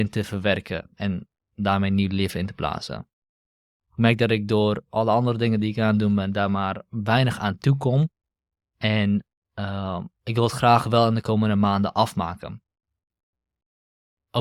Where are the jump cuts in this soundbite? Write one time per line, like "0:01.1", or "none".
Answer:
none